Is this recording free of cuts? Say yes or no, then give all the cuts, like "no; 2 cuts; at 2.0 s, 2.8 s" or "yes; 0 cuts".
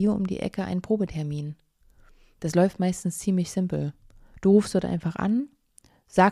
yes; 0 cuts